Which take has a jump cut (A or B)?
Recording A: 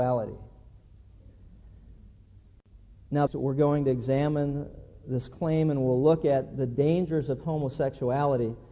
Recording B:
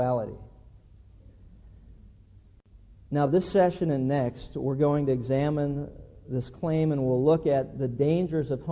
A